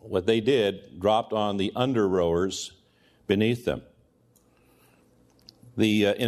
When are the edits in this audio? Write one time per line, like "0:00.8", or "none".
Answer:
none

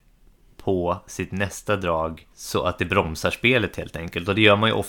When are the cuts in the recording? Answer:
0:02.3

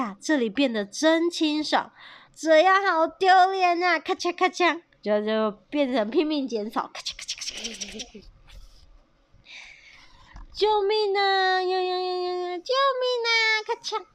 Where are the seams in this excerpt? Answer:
0:02.3

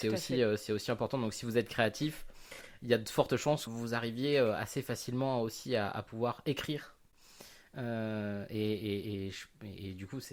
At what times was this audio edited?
0:03.7

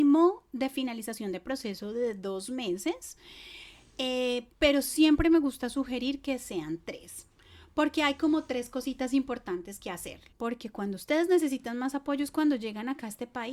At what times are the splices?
0:10.3

